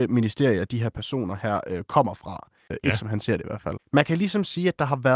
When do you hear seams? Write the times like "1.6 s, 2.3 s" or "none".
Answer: 2.7 s, 3.8 s